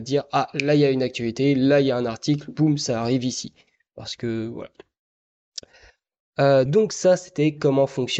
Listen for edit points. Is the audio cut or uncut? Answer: uncut